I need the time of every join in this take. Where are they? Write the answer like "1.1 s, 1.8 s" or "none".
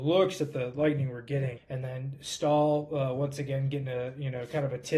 1.6 s